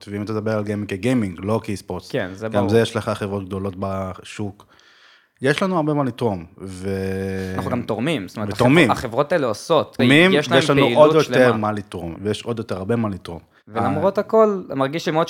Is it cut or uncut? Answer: cut